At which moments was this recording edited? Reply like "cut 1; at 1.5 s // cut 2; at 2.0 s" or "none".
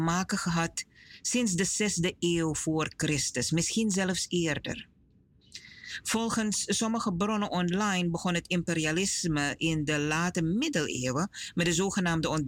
none